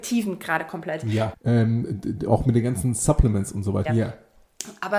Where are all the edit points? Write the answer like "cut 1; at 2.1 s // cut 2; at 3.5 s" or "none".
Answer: cut 1; at 1.3 s // cut 2; at 3.8 s